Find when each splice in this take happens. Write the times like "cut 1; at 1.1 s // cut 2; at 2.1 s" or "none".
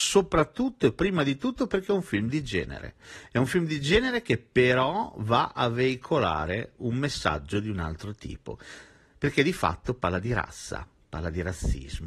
none